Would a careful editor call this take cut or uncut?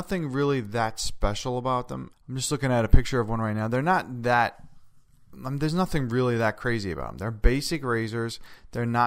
cut